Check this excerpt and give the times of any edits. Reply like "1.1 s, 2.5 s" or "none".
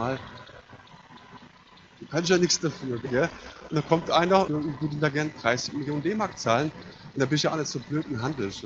3.0 s, 4.5 s